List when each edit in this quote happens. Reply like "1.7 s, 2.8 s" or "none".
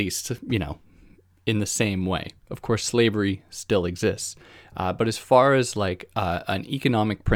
none

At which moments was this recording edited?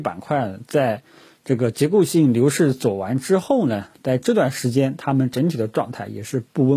none

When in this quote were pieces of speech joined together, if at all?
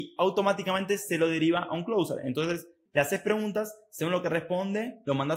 2.9 s

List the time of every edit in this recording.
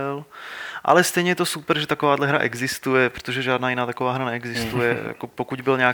none

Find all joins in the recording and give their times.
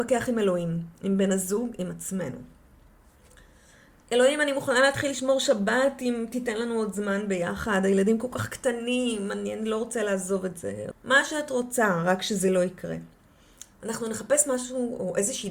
10.9 s

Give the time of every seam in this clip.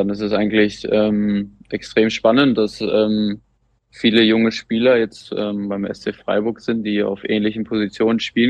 none

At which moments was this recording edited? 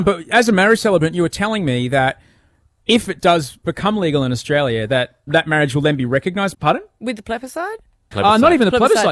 5.3 s, 6.5 s, 8.1 s

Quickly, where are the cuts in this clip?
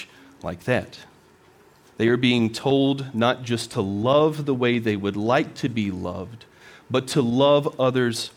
none

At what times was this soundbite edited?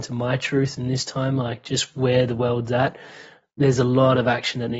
none

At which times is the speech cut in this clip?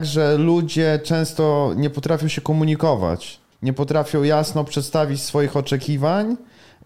3.5 s

